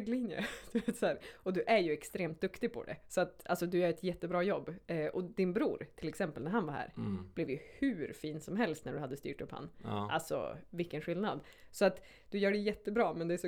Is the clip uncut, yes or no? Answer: yes